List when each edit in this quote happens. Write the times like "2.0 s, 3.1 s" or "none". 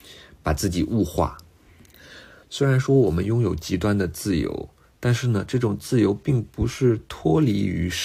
2.4 s

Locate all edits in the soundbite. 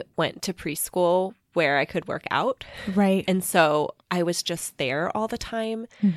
none

